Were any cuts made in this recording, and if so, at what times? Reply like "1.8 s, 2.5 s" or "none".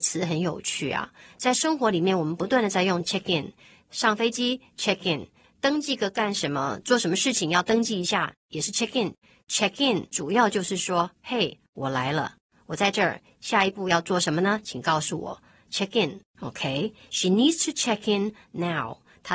5.4 s